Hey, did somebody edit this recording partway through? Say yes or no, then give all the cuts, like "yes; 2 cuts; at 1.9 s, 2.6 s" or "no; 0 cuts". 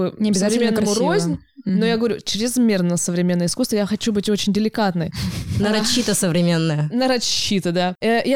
no; 0 cuts